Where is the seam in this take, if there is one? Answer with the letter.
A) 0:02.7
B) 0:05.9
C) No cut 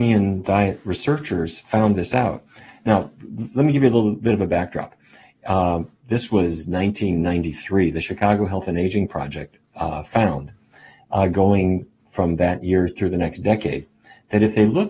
C